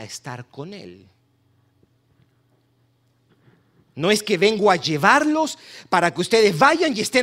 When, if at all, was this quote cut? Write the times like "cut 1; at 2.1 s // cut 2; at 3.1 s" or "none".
none